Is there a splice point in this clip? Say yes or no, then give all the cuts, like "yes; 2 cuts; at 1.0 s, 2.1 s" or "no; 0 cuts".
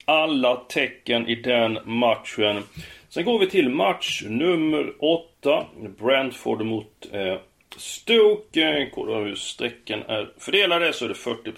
no; 0 cuts